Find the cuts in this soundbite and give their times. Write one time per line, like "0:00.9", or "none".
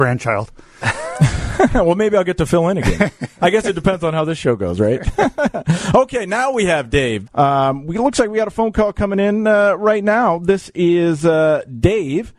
0:07.3